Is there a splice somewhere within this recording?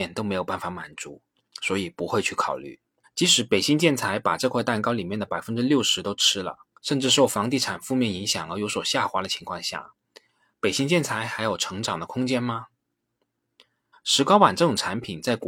yes; 3 cuts; at 3.0 s, 6.8 s, 13.9 s

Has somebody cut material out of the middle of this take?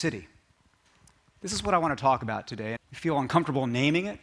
yes; 1 cut; at 2.8 s

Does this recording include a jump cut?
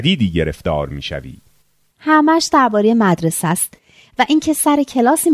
yes; 1 cut; at 1.9 s

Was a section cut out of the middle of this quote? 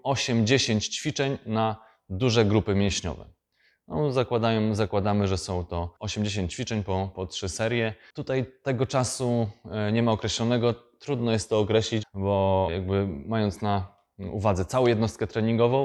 yes; 1 cut; at 12.0 s

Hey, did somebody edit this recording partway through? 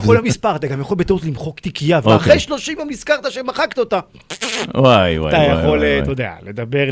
yes; 1 cut; at 2.0 s

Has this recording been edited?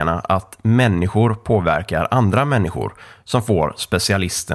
no; 0 cuts

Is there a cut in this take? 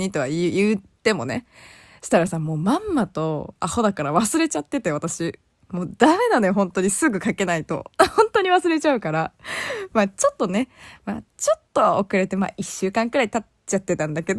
no; 0 cuts

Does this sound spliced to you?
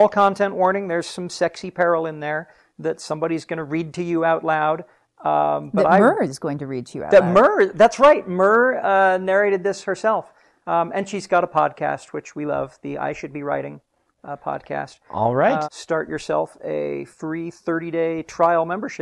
yes; 1 cut; at 15.6 s

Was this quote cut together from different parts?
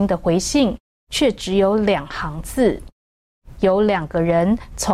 no; 0 cuts

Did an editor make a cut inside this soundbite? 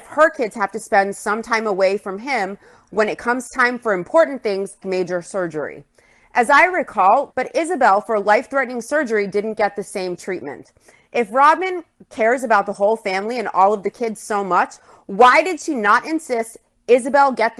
yes; 2 cuts; at 4.8 s, 7.3 s

